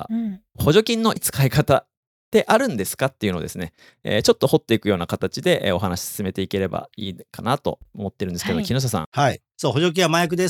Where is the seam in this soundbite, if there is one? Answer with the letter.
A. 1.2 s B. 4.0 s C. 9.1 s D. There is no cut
A